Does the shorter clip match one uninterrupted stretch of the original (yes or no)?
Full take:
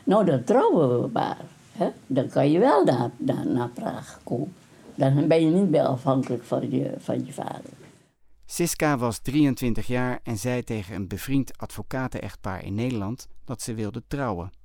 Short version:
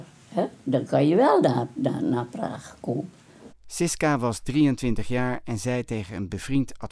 no